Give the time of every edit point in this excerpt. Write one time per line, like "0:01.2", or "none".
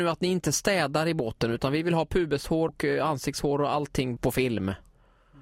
0:02.7
0:04.2